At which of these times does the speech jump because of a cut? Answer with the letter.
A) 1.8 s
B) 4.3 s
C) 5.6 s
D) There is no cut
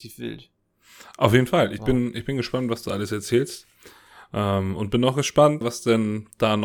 C